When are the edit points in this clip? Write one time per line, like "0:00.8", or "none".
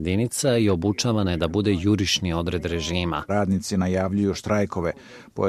0:03.3